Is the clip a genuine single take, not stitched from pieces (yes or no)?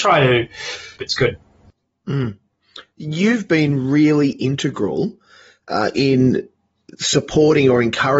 no